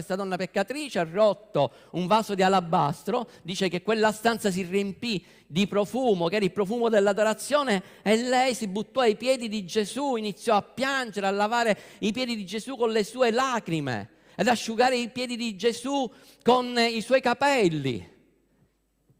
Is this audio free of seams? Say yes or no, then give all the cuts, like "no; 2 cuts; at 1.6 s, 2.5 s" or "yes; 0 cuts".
yes; 0 cuts